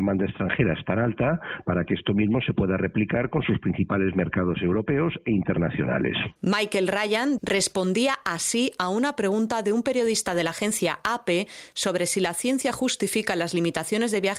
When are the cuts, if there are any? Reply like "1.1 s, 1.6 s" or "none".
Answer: 6.4 s, 7.4 s